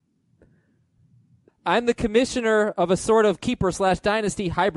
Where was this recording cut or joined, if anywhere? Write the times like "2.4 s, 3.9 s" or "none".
1.5 s

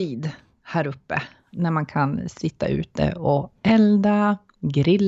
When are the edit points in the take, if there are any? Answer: none

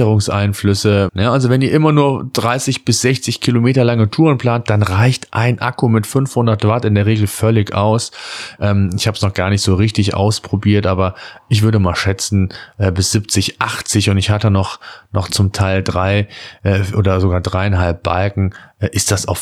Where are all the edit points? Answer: 1.1 s, 8.6 s

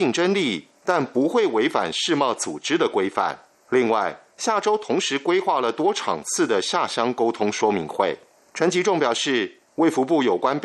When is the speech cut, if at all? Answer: 9.6 s

